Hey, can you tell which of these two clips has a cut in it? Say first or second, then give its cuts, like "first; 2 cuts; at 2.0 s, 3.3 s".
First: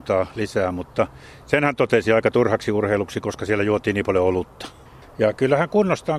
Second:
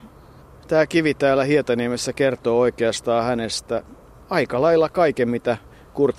first; 1 cut; at 5.0 s